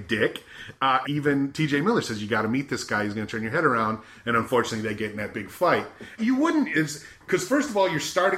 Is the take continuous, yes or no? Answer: no